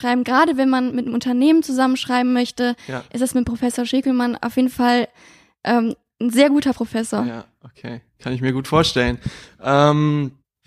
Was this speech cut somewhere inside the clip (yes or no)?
no